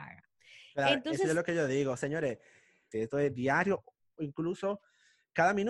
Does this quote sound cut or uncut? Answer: cut